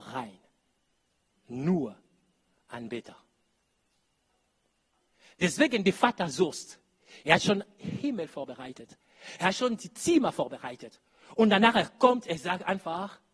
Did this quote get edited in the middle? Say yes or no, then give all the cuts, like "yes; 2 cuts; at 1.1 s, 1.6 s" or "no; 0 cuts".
no; 0 cuts